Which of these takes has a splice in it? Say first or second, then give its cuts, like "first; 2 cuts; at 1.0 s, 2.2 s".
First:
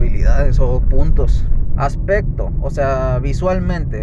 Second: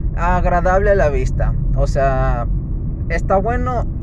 first; 1 cut; at 1.8 s